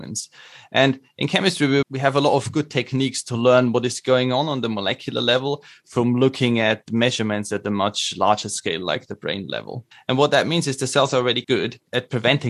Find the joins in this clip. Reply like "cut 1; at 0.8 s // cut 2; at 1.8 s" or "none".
cut 1; at 1.8 s // cut 2; at 9.9 s // cut 3; at 11.4 s